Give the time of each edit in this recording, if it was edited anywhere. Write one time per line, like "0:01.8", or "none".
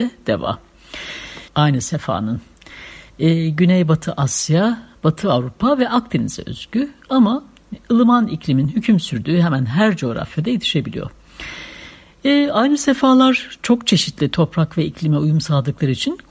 0:01.5
0:03.1